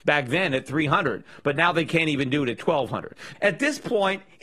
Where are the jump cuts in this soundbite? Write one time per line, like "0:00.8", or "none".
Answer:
0:03.3